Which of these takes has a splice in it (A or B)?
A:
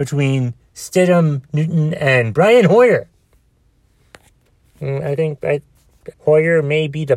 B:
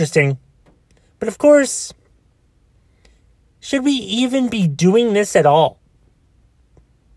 A